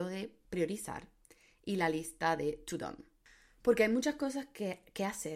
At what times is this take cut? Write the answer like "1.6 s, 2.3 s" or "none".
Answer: none